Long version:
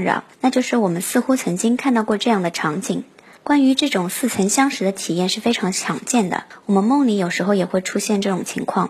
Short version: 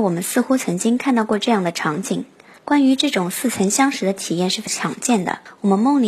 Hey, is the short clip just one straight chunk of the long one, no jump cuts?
no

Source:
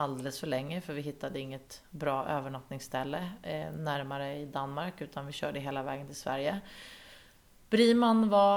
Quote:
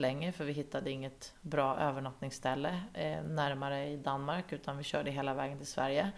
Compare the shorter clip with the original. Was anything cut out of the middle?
no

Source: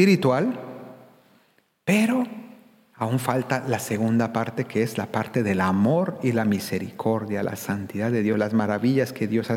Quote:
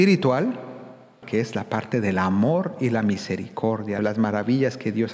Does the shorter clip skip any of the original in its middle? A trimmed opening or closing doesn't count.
yes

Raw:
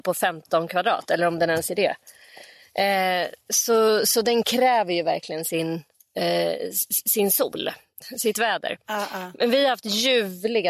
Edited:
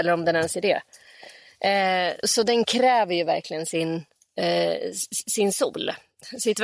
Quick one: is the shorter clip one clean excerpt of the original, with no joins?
no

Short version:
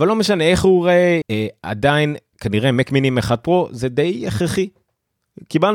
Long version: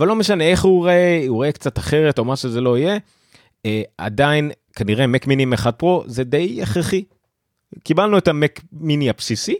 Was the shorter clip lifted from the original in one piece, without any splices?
no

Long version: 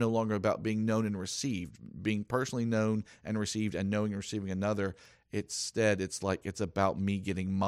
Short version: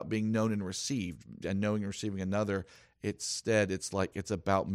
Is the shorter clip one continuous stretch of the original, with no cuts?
no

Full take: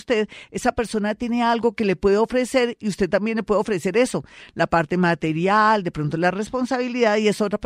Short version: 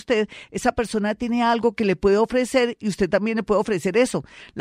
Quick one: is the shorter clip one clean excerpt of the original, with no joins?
yes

